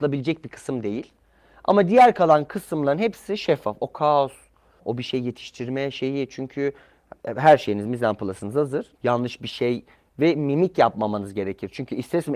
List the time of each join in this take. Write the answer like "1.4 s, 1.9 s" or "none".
4.8 s, 8.9 s